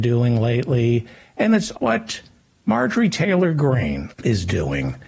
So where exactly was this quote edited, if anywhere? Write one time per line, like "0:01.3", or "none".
0:01.7
0:04.1